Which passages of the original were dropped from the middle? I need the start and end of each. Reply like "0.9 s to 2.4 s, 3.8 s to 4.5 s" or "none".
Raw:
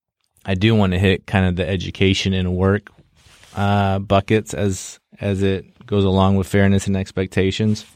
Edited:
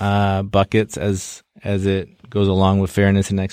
none